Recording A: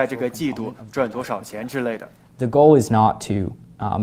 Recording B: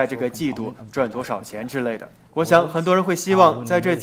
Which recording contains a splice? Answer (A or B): B